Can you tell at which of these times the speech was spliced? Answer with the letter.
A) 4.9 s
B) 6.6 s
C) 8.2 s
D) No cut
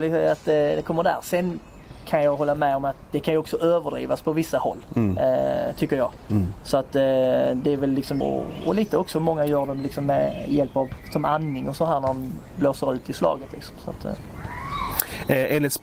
C